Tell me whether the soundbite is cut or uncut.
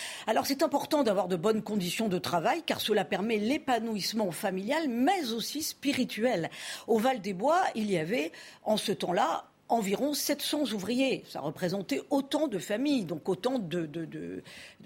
uncut